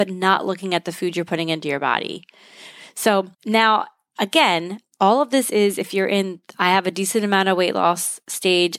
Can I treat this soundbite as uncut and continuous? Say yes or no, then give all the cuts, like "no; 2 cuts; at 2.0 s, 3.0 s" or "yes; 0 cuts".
no; 1 cut; at 3.3 s